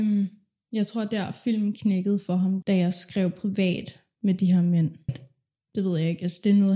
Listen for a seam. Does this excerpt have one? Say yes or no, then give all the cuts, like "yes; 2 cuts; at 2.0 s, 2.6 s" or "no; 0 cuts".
yes; 2 cuts; at 2.6 s, 5.1 s